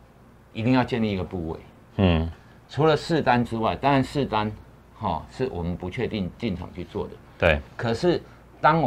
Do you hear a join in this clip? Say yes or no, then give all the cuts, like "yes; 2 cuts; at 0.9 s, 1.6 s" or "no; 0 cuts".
no; 0 cuts